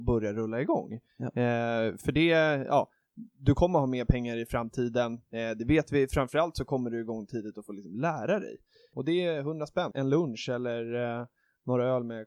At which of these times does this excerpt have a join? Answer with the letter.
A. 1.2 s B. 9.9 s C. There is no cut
B